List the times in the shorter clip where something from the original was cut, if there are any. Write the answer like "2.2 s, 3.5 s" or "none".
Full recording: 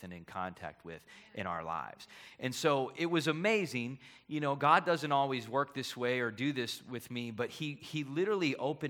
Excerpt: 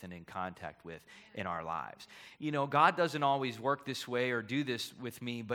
2.4 s